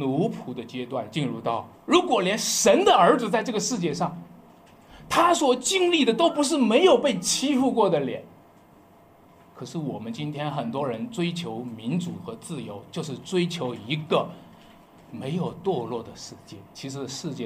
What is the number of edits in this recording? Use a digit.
1